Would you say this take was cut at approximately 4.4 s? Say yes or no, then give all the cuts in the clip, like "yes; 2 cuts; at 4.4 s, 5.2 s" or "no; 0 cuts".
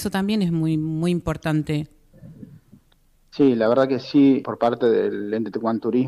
yes; 1 cut; at 4.4 s